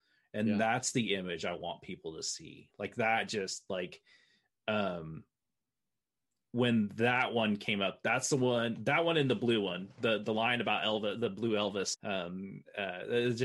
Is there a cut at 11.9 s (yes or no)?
yes